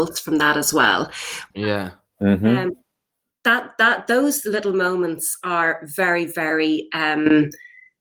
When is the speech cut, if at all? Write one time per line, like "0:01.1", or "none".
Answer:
0:01.5